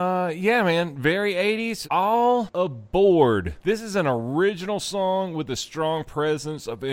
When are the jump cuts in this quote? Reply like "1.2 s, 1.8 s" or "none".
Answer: 1.8 s, 3.6 s